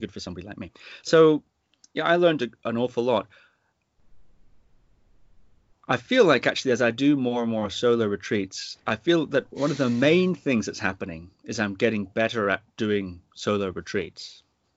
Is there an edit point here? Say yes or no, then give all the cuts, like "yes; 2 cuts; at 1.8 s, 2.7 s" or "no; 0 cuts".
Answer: yes; 2 cuts; at 5.7 s, 12.7 s